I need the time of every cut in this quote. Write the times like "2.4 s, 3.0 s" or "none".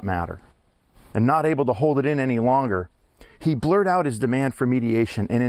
1.1 s